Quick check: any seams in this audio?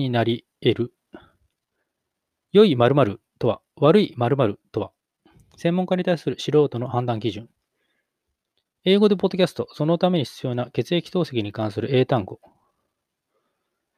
no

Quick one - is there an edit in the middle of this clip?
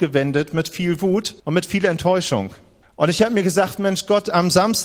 yes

